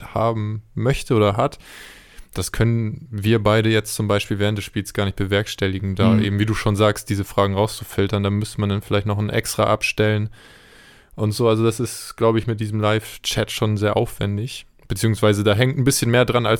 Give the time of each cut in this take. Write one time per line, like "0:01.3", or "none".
none